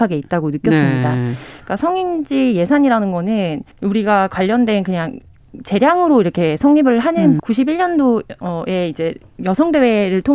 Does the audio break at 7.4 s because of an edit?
yes; 2 cuts; at 3.7 s, 7.4 s

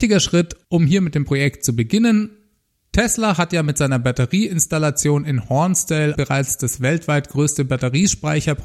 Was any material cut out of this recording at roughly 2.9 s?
no; 1 cut; at 6.2 s

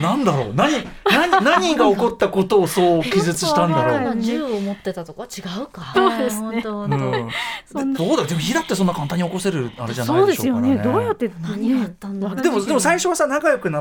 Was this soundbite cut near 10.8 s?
no; 3 cuts; at 5.9 s, 7.9 s, 12.4 s

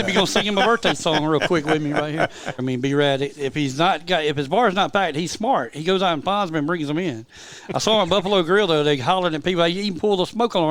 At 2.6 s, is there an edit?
yes; 1 cut; at 2.6 s

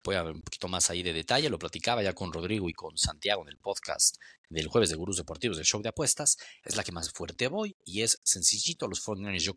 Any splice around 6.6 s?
yes; 1 cut; at 6.6 s

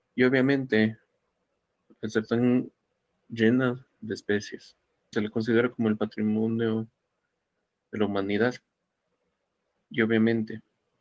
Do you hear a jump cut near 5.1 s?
yes; 1 cut; at 5.1 s

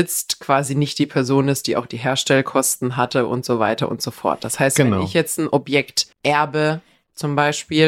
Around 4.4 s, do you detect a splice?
no; 1 cut; at 6.1 s

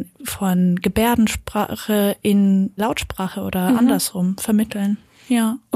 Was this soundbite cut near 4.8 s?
no; 1 cut; at 2.8 s

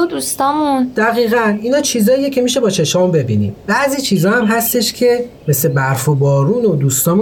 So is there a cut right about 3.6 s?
yes; 1 cut; at 3.6 s

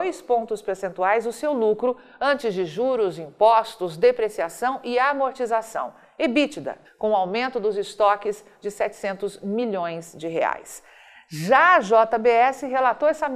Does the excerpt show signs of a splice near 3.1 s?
no; 1 cut; at 6.8 s

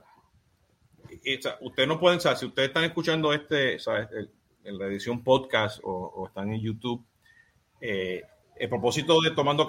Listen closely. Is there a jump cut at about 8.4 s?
yes; 1 cut; at 8.4 s

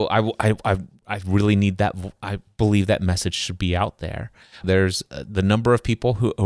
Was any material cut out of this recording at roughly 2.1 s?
no; 1 cut; at 4.6 s

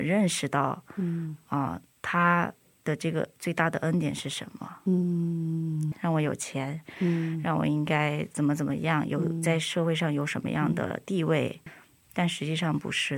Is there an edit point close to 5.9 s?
yes; 2 cuts; at 5.9 s, 11.7 s

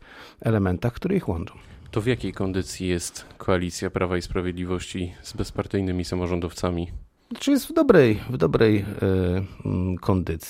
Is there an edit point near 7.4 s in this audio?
no; 0 cuts

